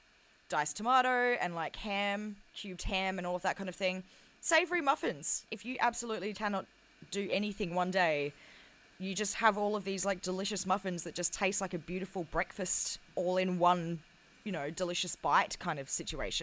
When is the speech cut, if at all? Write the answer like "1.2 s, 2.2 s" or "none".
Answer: 6.3 s